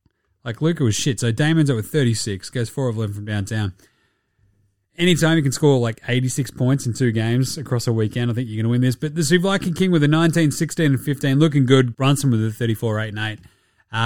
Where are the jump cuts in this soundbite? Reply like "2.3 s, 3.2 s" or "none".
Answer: 11.9 s